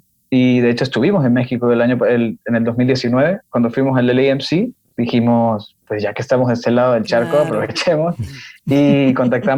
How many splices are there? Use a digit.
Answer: 0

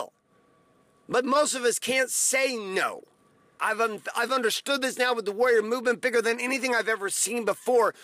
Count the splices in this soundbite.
1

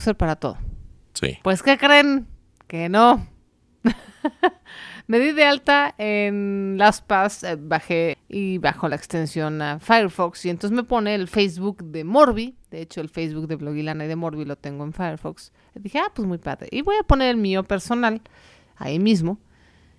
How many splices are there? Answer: 1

